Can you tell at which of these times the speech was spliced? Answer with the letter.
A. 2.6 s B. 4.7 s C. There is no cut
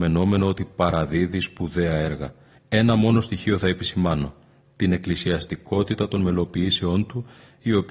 A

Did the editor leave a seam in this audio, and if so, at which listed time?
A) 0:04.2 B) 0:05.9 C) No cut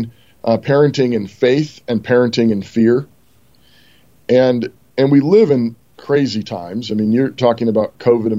B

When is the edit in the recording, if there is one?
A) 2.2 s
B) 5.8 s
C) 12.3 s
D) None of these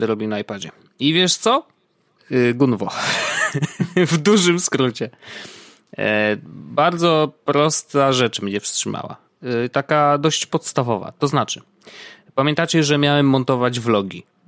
A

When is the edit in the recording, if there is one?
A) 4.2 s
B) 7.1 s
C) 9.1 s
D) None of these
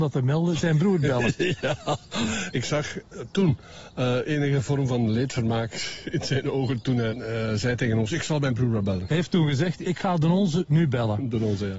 B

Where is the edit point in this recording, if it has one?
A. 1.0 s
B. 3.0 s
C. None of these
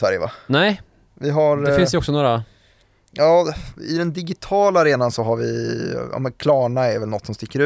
C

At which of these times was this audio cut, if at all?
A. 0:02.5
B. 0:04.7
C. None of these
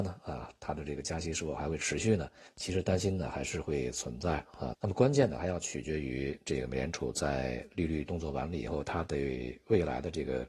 B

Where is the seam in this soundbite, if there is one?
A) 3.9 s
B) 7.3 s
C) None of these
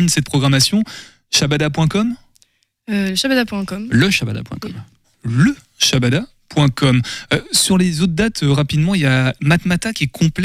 C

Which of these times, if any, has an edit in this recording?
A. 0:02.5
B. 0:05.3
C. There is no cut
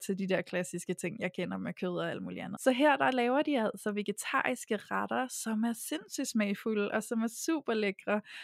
A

